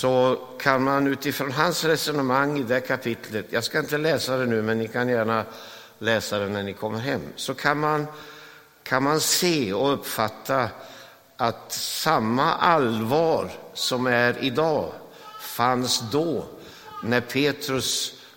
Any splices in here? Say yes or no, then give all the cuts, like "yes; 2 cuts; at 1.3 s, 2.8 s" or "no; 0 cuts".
no; 0 cuts